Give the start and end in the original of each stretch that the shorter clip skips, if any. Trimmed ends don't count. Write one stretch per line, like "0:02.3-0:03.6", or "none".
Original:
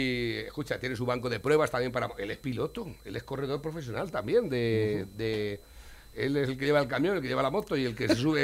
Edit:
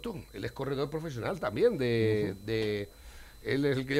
none